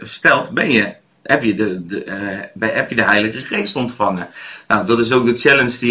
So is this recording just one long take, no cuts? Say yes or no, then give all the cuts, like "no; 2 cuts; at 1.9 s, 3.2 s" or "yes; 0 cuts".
yes; 0 cuts